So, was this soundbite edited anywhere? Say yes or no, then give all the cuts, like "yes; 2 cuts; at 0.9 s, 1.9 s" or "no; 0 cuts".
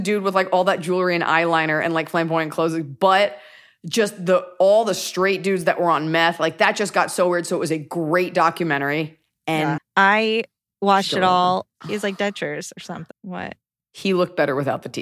yes; 3 cuts; at 9.8 s, 11.8 s, 13.1 s